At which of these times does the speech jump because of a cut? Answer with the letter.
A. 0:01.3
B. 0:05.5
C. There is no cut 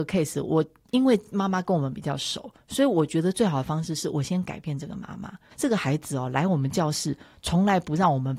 B